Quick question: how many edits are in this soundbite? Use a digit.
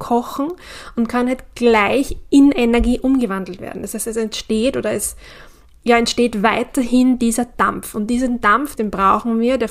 1